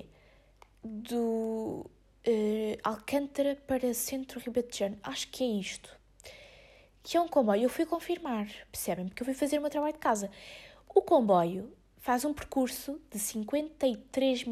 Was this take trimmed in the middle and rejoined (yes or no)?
no